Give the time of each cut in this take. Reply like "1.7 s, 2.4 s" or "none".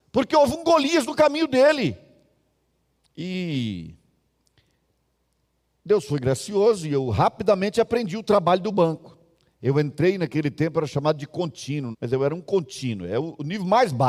3.0 s, 11.9 s